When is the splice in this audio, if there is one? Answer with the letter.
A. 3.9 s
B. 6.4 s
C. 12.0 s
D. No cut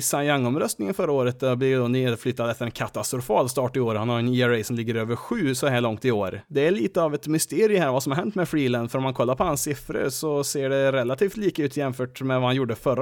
D